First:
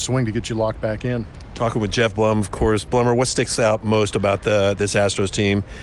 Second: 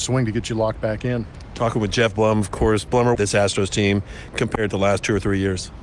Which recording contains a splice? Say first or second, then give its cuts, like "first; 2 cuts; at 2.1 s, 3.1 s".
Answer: second; 2 cuts; at 3.1 s, 4.7 s